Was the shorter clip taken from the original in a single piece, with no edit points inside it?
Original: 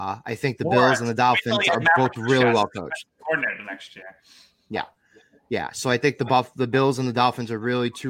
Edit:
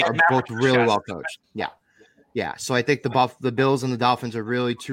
no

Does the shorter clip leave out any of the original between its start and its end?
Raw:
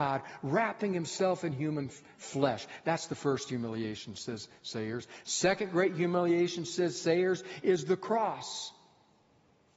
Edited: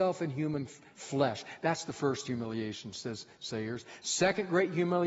no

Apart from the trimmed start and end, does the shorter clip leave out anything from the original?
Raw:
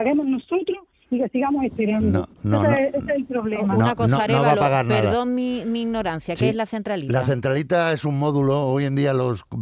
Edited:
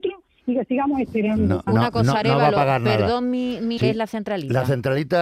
yes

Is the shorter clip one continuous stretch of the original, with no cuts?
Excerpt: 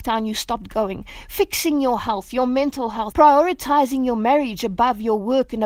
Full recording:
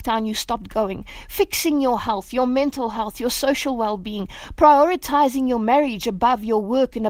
no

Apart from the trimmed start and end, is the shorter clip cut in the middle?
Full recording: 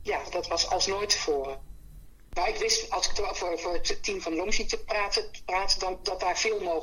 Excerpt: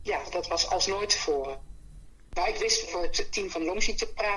yes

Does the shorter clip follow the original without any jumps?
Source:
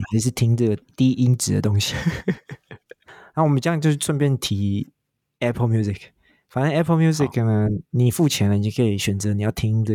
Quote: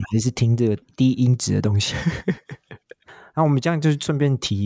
yes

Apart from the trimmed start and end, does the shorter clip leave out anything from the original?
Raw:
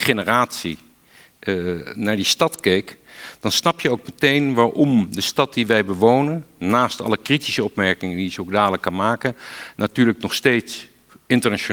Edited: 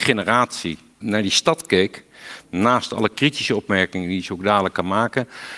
yes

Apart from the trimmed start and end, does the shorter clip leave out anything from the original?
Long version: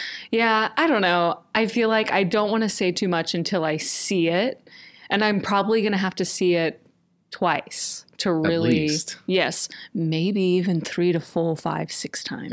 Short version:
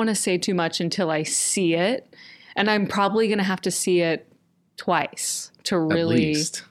no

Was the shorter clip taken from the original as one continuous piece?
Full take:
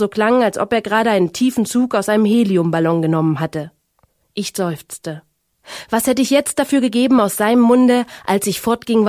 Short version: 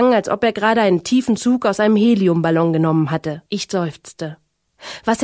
no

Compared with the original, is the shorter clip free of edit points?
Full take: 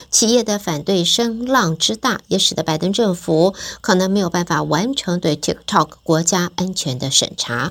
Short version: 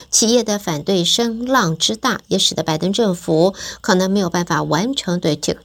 yes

